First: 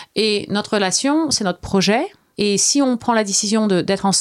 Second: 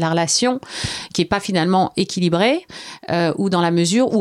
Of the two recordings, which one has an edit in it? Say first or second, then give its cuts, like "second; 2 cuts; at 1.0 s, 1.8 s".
first; 1 cut; at 2.3 s